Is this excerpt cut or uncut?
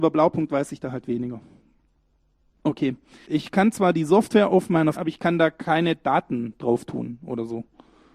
cut